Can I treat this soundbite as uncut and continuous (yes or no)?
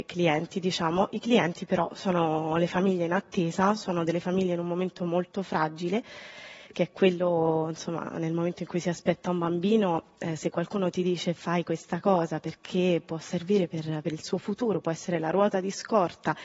yes